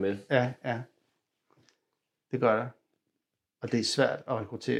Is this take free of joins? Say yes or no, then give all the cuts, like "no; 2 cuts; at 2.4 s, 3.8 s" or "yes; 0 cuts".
yes; 0 cuts